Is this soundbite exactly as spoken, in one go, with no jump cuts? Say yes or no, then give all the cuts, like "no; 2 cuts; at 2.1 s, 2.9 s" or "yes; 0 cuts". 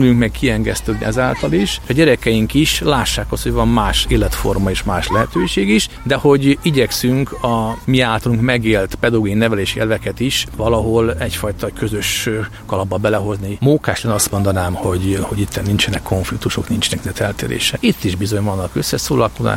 no; 1 cut; at 13.6 s